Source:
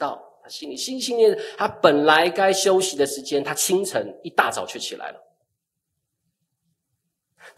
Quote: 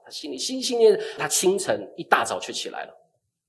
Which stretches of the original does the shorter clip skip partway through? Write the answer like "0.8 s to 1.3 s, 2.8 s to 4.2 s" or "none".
1.6 s to 3.4 s